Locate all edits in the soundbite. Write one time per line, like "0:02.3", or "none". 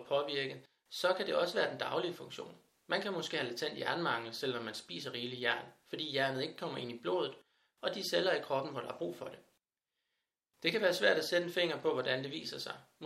none